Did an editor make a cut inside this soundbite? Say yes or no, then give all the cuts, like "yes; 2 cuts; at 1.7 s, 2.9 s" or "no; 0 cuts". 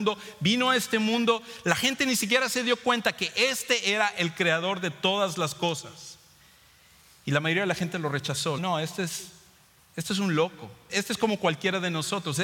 yes; 2 cuts; at 8.6 s, 10.9 s